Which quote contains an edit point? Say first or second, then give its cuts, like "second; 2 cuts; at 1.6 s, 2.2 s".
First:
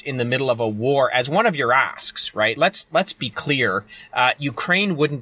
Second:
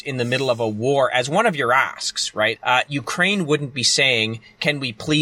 second; 1 cut; at 2.6 s